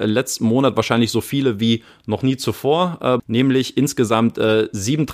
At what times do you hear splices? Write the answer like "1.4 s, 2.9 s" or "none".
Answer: 3.2 s

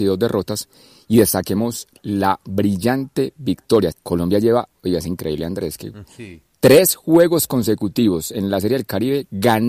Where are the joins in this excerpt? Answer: 3.9 s, 6.0 s

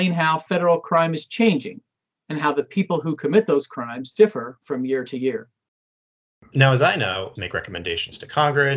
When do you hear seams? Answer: 7.4 s

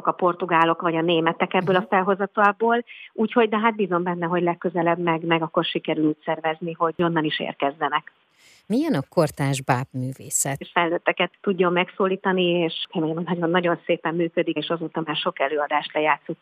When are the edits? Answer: 10.6 s, 14.6 s

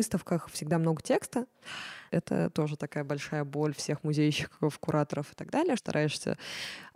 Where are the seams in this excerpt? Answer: 2.1 s, 5.8 s

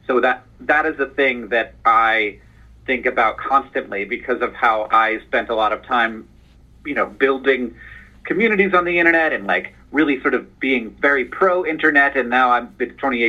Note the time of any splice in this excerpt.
none

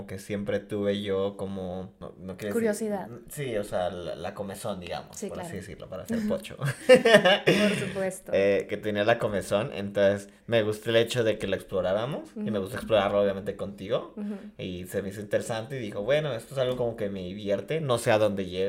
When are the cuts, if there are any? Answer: none

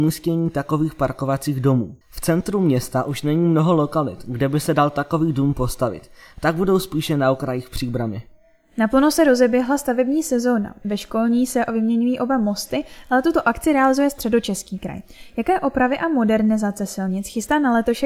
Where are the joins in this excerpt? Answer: 2.0 s

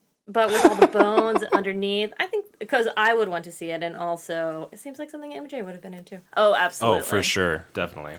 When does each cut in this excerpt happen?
none

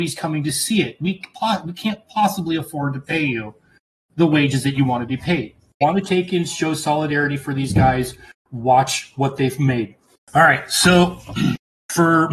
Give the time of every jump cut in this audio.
5.8 s

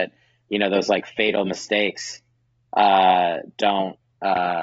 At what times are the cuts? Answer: none

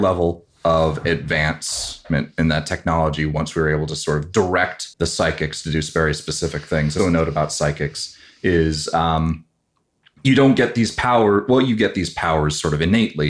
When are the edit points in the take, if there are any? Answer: 4.9 s, 7.0 s

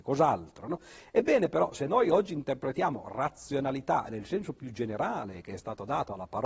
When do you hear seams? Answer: none

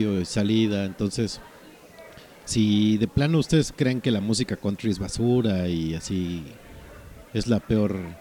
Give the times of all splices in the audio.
7.3 s

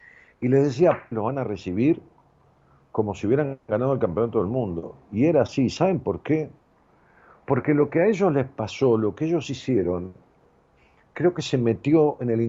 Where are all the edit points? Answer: 1.1 s

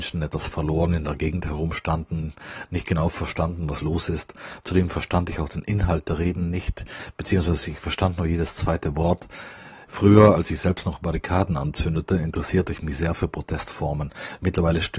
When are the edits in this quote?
4.6 s, 9.9 s

